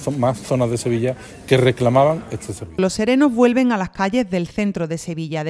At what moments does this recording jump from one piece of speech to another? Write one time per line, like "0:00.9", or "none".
0:02.8